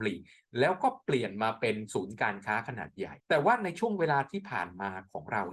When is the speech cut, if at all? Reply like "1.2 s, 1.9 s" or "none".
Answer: 3.2 s